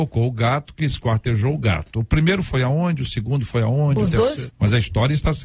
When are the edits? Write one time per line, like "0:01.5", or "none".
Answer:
0:04.5